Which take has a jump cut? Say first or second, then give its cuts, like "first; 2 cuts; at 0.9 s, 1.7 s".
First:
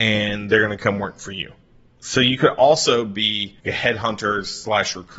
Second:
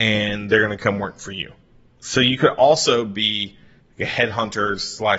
first; 1 cut; at 3.6 s